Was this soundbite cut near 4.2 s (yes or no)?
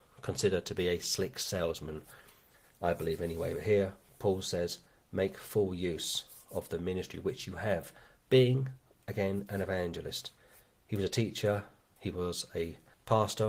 no